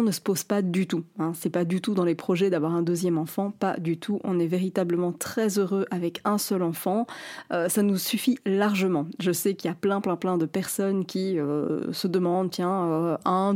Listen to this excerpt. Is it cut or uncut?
uncut